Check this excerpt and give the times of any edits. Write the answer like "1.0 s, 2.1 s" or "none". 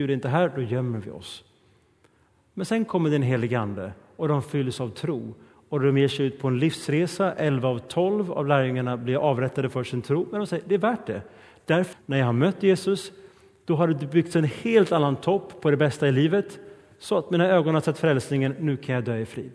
11.9 s